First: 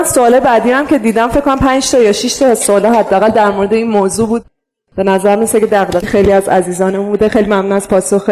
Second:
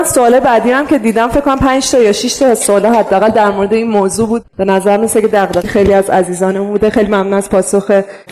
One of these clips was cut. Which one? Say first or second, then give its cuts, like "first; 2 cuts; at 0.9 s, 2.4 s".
second; 1 cut; at 4.5 s